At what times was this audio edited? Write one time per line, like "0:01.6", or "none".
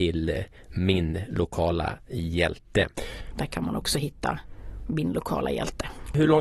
0:03.3